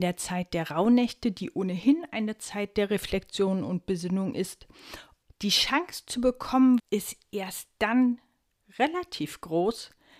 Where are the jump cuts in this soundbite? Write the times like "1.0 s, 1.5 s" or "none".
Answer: 5.2 s, 6.8 s